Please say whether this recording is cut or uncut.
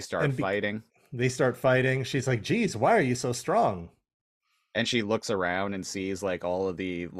uncut